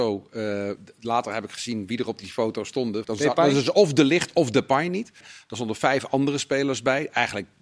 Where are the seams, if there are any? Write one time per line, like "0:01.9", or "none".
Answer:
0:03.0
0:05.2